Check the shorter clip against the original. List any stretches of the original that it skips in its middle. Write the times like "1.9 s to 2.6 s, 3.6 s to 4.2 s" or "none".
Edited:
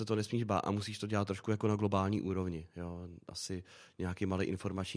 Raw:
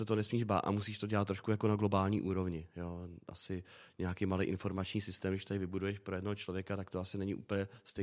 none